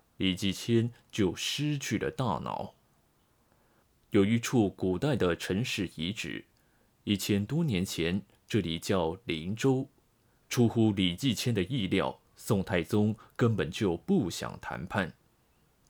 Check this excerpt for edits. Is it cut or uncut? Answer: cut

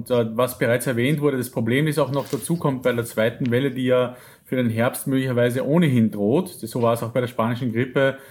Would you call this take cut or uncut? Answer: uncut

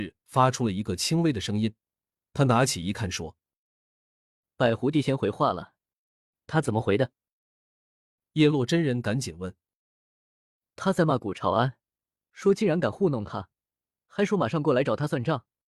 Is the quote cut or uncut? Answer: uncut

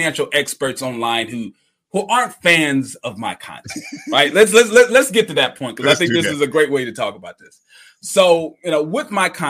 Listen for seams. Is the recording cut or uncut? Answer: uncut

